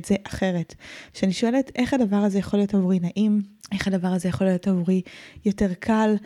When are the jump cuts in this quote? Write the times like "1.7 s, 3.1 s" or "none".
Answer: none